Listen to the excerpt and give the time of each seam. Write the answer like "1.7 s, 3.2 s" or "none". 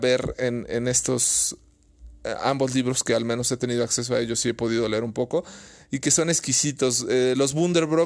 none